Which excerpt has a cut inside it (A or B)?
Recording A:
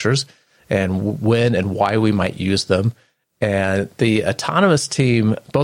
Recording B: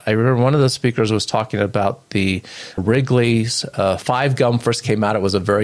B